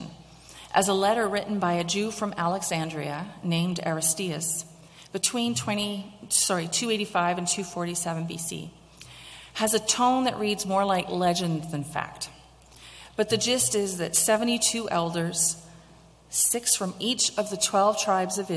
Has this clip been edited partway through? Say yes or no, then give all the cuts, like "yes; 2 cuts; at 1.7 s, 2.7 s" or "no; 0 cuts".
no; 0 cuts